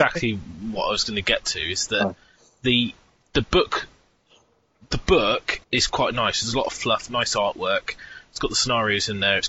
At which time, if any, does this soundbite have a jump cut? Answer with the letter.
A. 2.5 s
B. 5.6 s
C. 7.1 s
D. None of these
B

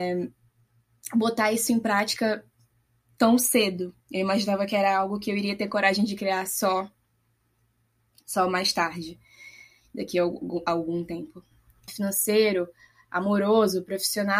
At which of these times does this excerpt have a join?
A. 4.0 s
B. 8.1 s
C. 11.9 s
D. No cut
C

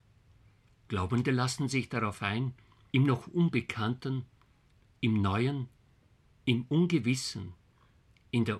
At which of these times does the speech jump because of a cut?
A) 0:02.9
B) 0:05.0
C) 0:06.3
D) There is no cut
A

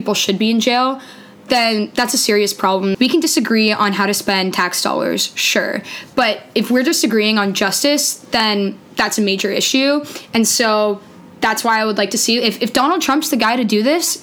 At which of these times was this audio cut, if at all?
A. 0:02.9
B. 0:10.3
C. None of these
A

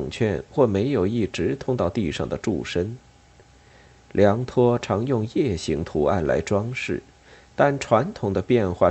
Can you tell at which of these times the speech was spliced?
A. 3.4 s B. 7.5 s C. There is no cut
C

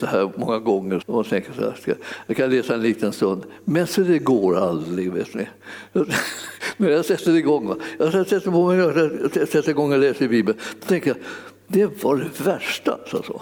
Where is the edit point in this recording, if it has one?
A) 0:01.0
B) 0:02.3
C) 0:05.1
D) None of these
A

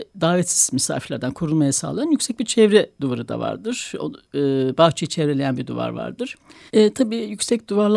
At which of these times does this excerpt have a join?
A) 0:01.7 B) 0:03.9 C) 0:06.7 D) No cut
C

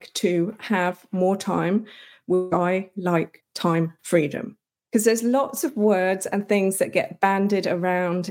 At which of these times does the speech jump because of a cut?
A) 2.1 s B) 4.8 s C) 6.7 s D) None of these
B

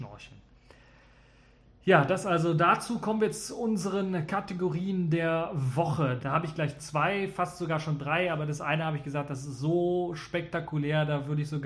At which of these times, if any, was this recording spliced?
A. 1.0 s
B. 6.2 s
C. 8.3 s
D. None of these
B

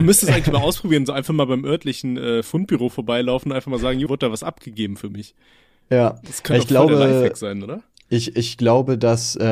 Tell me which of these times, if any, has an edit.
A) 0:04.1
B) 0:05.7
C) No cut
A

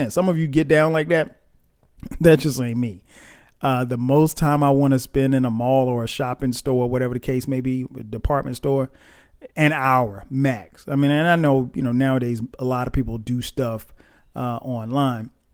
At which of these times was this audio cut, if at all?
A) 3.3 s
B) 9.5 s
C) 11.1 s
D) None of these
B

